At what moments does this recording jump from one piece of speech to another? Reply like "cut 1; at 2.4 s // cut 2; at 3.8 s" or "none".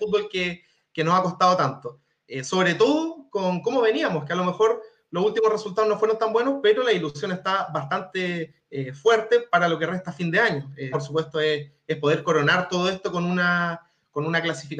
cut 1; at 10.9 s